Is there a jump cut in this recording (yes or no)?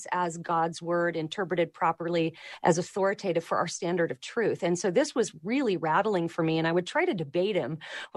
no